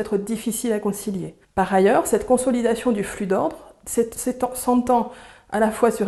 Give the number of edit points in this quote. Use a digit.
1